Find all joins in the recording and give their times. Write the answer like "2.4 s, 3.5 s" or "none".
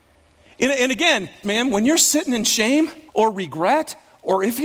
1.4 s, 3.1 s